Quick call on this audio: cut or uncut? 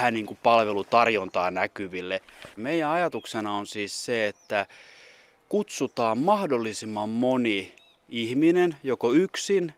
cut